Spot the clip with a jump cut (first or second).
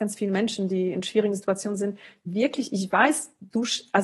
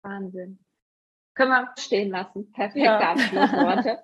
second